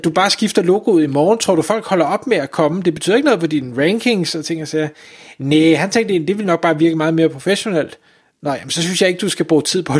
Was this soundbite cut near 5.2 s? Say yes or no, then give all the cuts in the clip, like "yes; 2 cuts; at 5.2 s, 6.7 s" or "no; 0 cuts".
no; 0 cuts